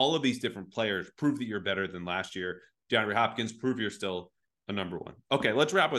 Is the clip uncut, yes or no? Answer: yes